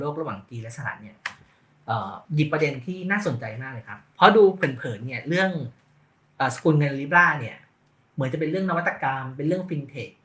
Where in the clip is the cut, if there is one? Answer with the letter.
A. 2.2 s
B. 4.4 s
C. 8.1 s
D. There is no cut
A